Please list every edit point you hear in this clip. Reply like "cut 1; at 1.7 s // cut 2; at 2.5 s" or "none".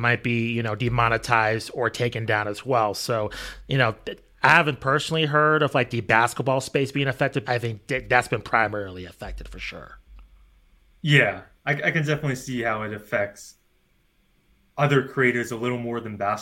cut 1; at 7.4 s

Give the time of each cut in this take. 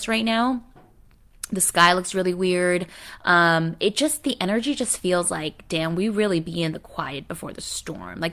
none

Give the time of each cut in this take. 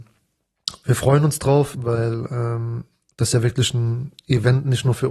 cut 1; at 1.7 s

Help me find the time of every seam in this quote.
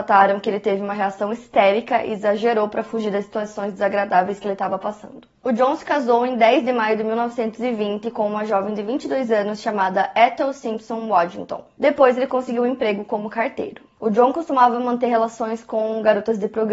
none

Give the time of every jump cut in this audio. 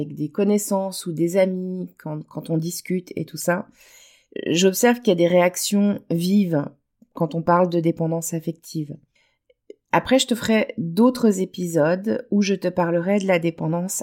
cut 1; at 9.8 s

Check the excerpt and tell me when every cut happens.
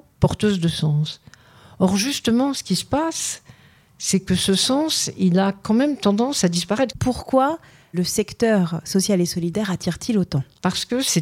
cut 1; at 6.9 s

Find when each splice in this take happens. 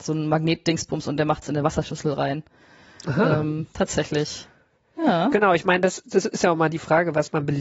none

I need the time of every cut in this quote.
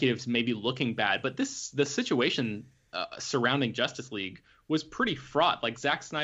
none

